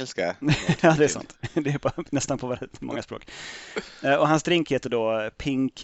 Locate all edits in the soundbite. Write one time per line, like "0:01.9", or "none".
none

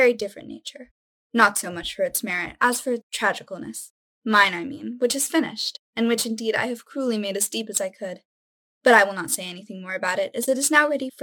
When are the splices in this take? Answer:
none

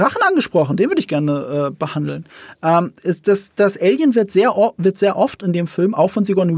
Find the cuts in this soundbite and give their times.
none

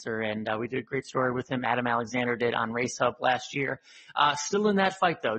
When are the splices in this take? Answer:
none

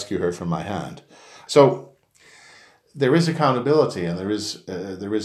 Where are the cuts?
0:01.5

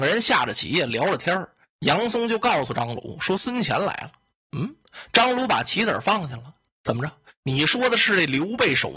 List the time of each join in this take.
none

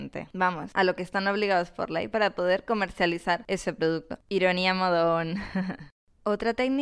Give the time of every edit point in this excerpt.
0:04.2

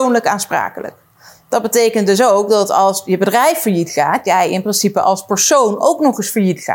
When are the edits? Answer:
none

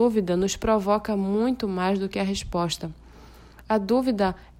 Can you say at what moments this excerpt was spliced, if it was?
none

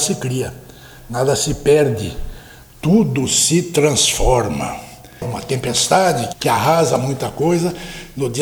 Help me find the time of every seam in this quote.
0:05.2
0:06.3

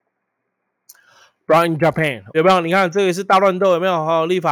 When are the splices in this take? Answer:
0:02.3

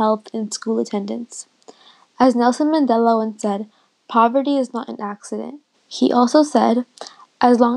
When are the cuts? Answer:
0:05.7

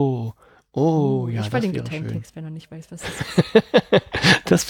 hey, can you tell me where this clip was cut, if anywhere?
none

